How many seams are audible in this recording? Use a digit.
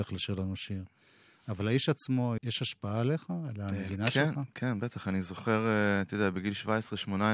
1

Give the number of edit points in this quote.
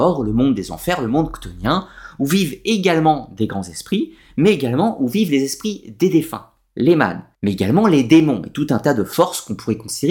1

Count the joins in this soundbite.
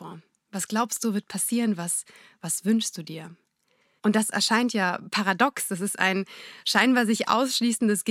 1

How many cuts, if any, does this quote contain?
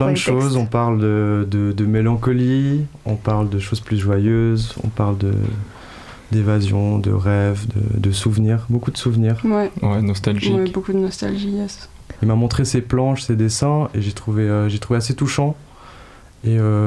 1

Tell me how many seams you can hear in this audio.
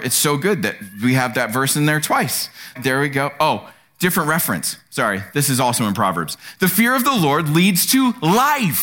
1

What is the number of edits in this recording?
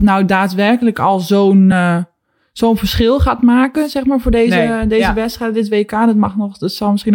0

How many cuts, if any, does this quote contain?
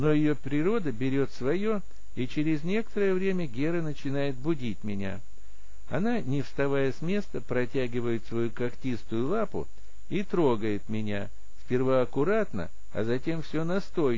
0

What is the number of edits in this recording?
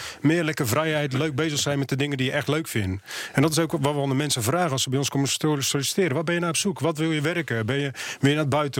0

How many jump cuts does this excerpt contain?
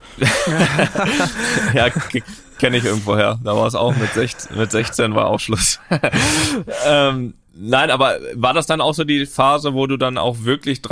0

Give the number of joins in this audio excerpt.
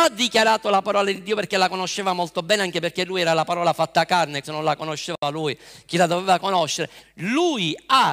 2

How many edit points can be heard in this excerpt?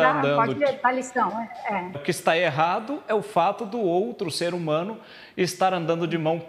1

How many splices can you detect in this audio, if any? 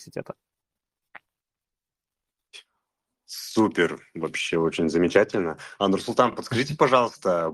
0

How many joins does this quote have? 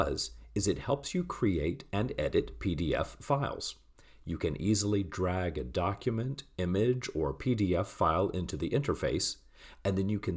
0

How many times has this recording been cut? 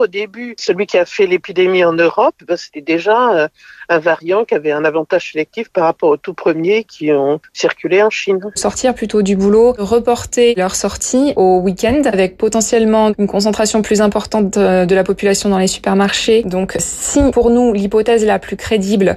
1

